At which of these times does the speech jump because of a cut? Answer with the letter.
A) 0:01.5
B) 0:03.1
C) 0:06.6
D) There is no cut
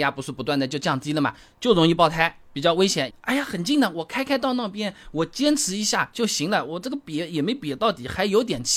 B